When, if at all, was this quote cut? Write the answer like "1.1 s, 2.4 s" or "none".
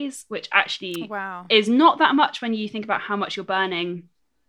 none